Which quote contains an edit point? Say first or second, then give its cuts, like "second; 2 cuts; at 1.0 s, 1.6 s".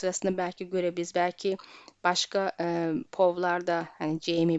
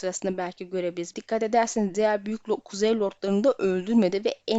second; 1 cut; at 1.1 s